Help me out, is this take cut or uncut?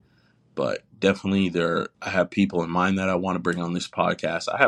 cut